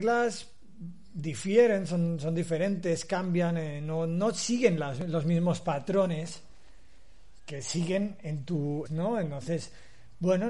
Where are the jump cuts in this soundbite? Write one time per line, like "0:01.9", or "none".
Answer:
0:07.5
0:08.9